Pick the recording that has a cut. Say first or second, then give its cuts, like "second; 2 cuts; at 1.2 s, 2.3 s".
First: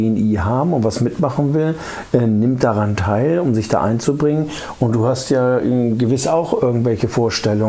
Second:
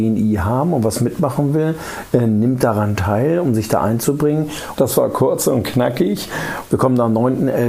second; 2 cuts; at 4.8 s, 6.7 s